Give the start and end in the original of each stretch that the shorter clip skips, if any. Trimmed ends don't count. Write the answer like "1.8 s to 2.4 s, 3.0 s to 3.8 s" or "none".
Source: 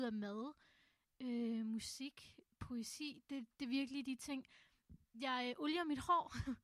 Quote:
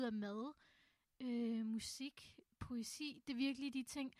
3.2 s to 3.6 s